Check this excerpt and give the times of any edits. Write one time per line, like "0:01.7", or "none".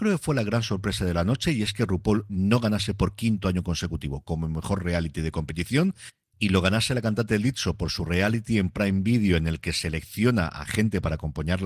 none